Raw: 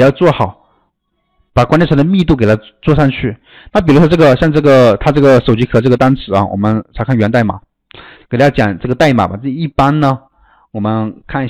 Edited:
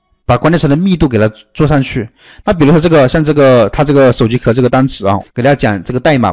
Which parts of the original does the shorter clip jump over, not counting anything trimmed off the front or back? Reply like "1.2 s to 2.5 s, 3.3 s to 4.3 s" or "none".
6.5 s to 8.1 s